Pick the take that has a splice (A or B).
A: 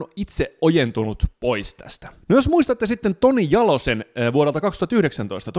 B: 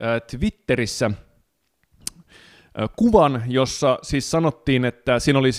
A